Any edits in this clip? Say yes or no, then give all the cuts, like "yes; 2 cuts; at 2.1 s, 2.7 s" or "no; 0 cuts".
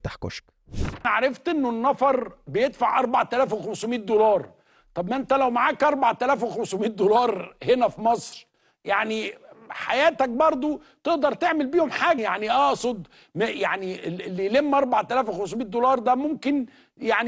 yes; 1 cut; at 12.2 s